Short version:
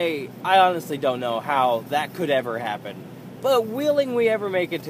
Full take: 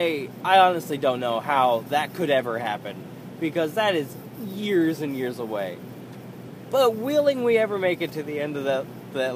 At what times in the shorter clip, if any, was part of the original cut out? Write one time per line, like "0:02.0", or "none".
0:03.4

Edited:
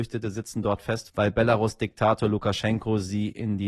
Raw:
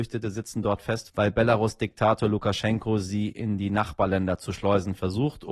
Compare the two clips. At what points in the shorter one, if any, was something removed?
none

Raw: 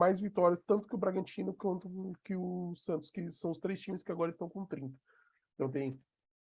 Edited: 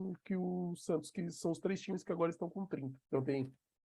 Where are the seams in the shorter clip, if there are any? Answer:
0:03.0

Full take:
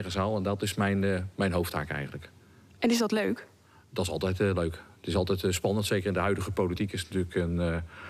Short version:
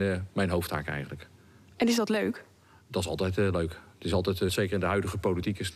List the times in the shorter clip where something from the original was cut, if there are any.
0:04.5

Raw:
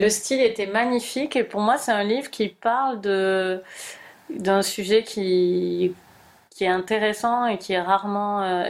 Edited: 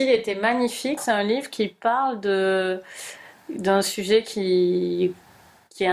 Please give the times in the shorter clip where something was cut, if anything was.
0:01.0

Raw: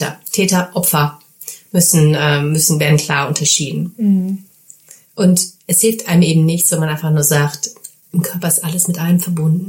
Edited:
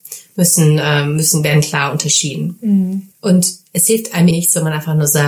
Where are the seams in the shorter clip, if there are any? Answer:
0:03.1
0:04.3

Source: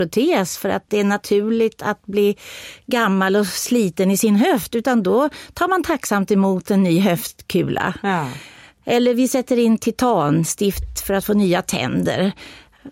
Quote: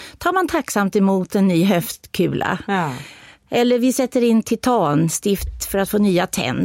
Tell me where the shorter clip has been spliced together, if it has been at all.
none

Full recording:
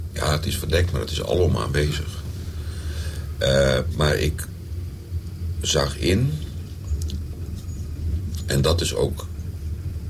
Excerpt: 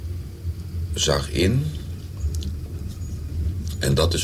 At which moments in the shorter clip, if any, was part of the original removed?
none

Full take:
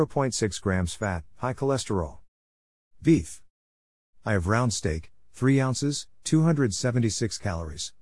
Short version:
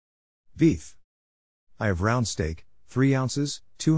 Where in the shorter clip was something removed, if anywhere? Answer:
none

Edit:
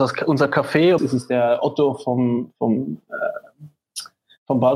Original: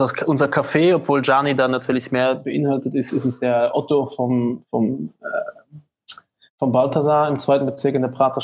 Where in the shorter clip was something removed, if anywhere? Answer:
0:01.0

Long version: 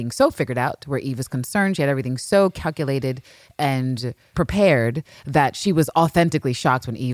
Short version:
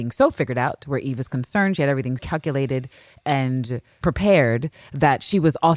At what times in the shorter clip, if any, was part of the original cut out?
0:02.2

